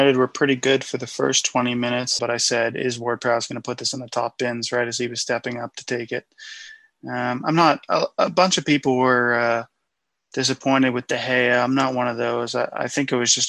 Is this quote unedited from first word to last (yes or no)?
no